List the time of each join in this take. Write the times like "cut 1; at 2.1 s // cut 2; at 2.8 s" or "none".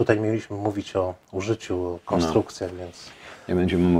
none